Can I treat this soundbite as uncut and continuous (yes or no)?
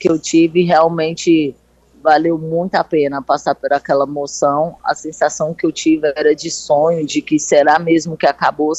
yes